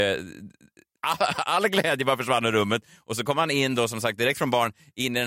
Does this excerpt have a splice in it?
no; 0 cuts

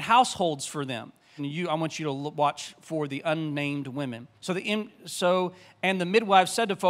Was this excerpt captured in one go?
no; 2 cuts; at 1.4 s, 4.4 s

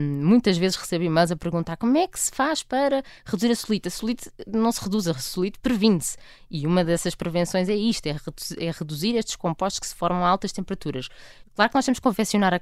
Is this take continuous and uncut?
no; 1 cut; at 11.4 s

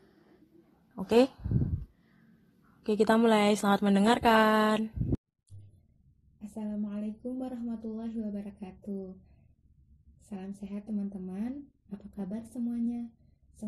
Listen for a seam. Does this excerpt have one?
no; 0 cuts

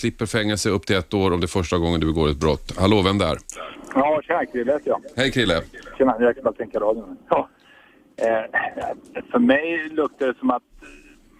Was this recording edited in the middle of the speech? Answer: no; 0 cuts

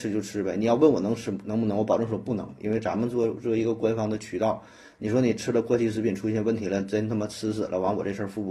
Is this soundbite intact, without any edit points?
yes; 0 cuts

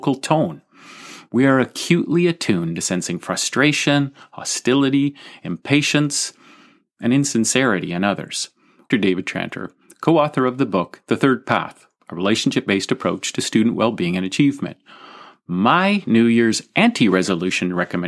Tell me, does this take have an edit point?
yes; 1 cut; at 8.9 s

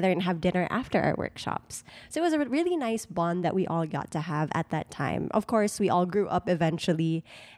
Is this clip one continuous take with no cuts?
yes; 0 cuts

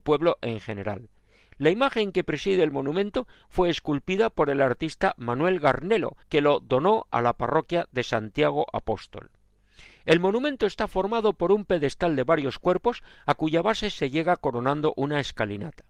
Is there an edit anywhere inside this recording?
yes; 1 cut; at 6.2 s

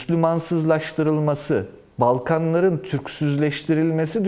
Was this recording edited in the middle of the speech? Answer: no; 0 cuts

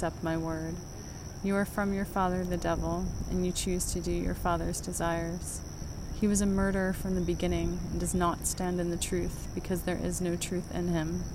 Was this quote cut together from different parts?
no; 0 cuts

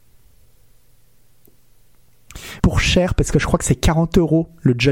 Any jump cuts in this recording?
yes; 1 cut; at 2.6 s

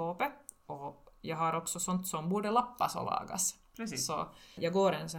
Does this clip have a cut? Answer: no; 0 cuts

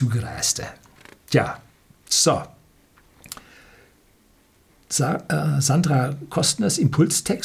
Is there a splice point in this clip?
no; 0 cuts

